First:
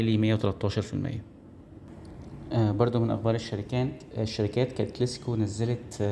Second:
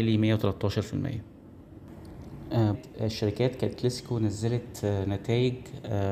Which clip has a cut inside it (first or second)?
second